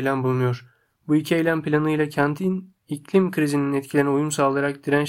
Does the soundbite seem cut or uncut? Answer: uncut